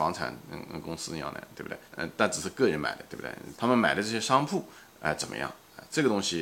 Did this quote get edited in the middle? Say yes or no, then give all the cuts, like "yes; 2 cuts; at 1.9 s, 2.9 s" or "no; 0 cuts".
yes; 2 cuts; at 1.9 s, 3.5 s